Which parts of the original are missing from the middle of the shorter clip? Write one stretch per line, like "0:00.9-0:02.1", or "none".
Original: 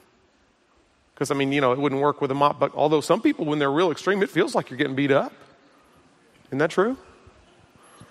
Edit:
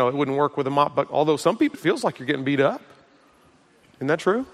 0:03.4-0:04.3